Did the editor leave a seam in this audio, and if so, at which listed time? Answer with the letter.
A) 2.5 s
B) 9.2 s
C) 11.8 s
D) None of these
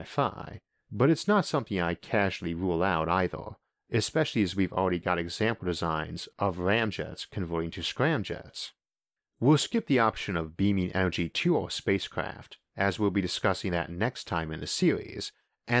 B